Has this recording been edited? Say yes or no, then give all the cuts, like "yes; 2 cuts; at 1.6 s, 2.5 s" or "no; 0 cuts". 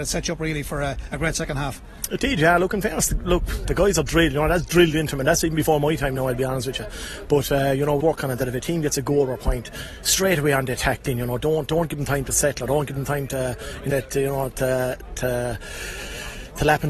yes; 2 cuts; at 8.0 s, 13.9 s